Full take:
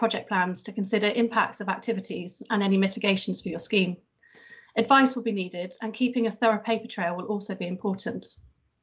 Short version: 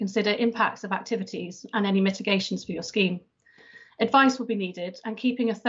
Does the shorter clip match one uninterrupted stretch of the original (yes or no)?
yes